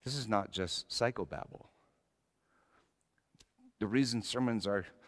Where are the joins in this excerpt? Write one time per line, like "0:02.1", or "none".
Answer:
none